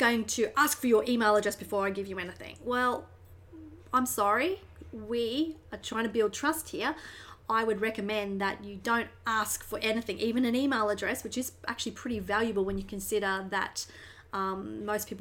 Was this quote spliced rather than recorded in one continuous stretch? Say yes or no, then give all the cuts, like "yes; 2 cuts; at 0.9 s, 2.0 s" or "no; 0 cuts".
no; 0 cuts